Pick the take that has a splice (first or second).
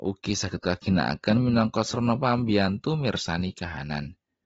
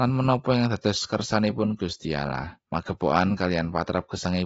second